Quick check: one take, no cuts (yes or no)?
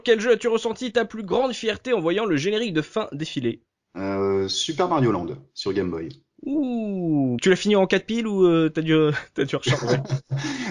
no